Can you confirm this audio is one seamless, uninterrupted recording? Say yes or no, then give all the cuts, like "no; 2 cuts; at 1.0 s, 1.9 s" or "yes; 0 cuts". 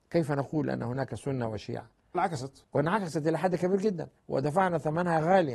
no; 2 cuts; at 2.1 s, 4.2 s